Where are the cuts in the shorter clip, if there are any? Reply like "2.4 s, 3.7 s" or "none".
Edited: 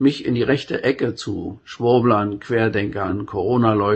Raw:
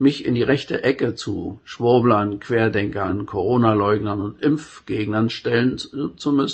none